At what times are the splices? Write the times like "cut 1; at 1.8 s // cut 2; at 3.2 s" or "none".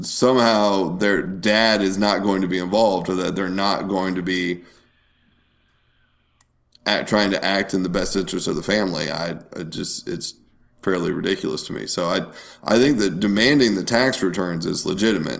none